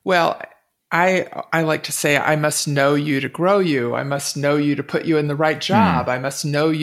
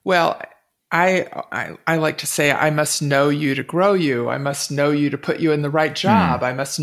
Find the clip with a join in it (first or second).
first